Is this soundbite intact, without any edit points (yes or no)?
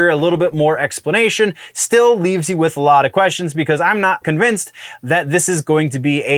no